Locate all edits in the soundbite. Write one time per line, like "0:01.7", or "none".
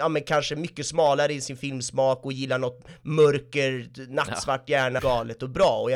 0:05.0